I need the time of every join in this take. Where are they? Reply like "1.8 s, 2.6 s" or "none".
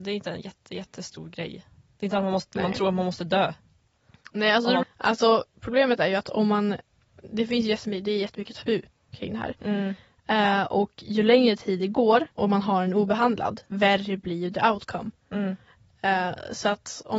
4.8 s, 12.3 s, 13.7 s